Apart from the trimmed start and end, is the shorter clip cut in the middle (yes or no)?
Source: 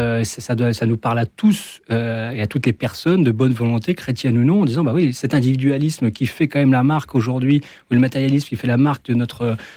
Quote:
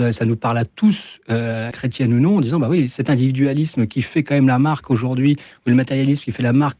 yes